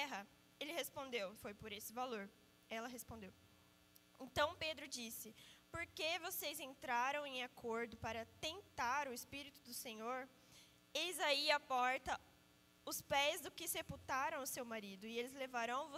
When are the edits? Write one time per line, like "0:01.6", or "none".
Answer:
0:01.4

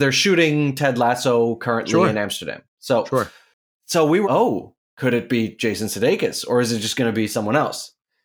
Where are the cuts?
0:04.2

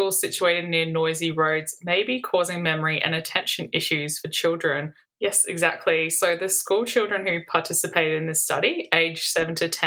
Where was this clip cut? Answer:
0:05.0

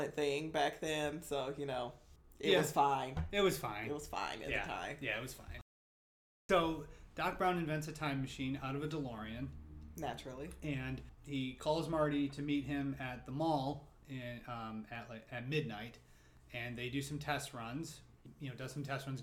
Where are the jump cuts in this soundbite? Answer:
none

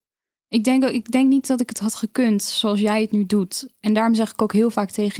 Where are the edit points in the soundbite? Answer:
none

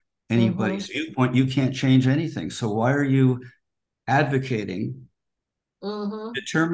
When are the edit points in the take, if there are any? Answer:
none

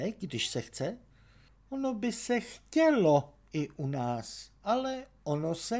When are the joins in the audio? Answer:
none

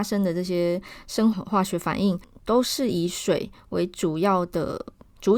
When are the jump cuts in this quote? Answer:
0:01.3

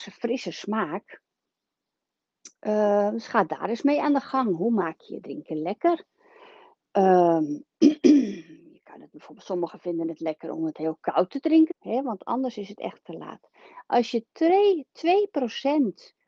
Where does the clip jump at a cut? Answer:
0:11.7

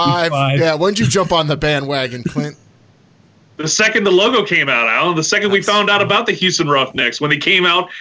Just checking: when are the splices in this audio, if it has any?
none

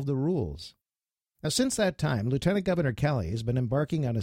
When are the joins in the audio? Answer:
none

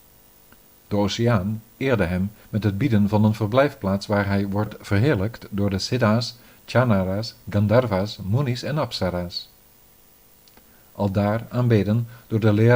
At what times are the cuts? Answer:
none

